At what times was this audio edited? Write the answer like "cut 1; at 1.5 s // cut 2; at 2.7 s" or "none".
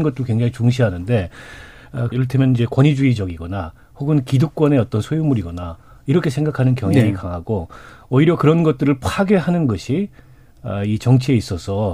cut 1; at 2.1 s